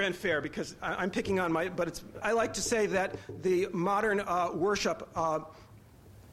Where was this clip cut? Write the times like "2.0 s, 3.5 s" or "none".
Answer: 2.2 s